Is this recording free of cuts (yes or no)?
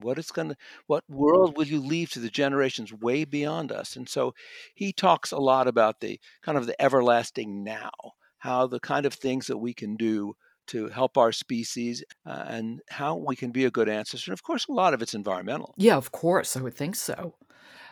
yes